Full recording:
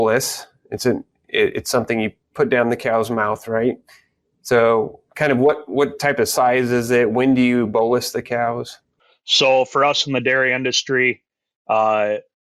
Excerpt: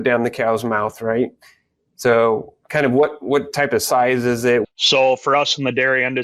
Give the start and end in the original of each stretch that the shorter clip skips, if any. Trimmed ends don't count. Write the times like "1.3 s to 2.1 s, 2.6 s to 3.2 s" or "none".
7.1 s to 9.1 s